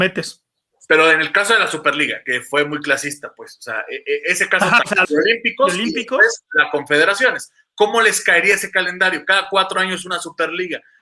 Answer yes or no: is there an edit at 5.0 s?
yes